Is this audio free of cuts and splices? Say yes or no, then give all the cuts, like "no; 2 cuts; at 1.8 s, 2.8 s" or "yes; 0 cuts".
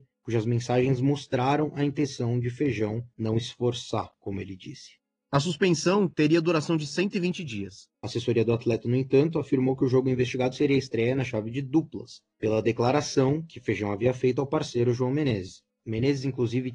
no; 1 cut; at 7.9 s